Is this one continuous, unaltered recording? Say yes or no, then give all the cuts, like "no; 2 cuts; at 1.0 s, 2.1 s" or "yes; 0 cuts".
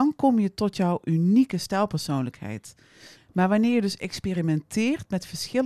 no; 1 cut; at 3.2 s